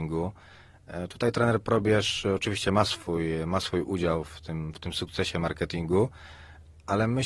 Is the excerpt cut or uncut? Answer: uncut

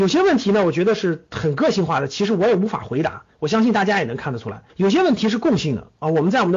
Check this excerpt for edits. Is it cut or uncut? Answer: cut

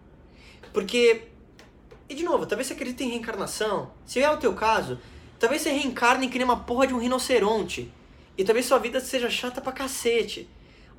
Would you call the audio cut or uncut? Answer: uncut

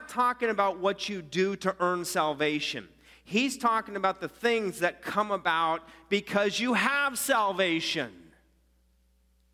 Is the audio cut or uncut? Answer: uncut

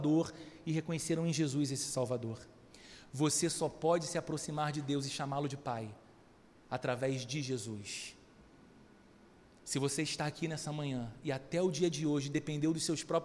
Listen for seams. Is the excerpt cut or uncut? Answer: uncut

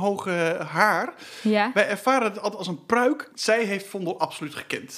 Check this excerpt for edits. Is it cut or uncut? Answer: cut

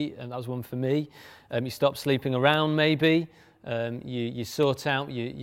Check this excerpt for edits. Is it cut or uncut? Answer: uncut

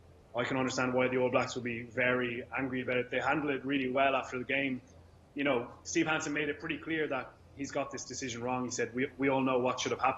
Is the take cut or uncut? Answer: uncut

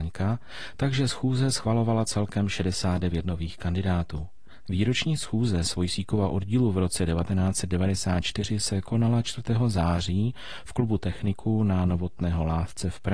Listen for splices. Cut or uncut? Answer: cut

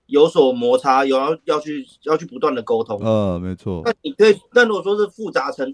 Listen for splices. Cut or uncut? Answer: uncut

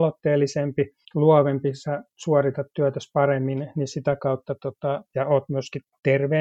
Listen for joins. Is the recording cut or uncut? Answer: cut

